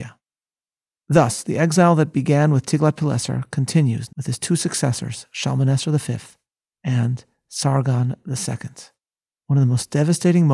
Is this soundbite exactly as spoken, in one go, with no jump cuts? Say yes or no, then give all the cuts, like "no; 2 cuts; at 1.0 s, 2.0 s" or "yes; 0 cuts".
no; 1 cut; at 4.1 s